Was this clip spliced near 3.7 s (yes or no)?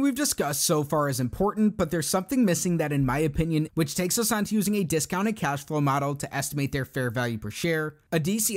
yes